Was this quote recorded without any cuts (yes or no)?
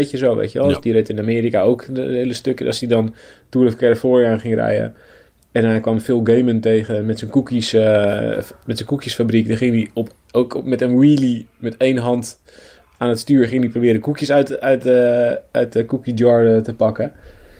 yes